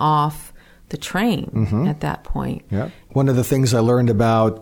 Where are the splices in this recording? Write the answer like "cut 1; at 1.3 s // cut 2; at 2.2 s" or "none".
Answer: cut 1; at 3.1 s